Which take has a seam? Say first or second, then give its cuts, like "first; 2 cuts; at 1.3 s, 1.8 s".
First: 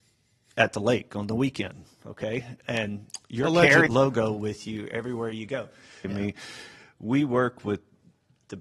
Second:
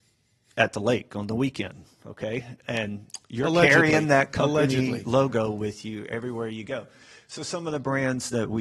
first; 2 cuts; at 3.9 s, 6.0 s